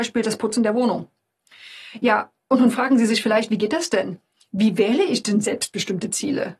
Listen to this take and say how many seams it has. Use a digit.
0